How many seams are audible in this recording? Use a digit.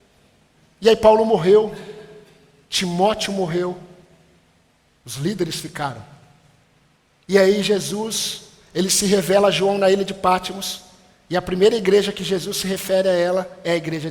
0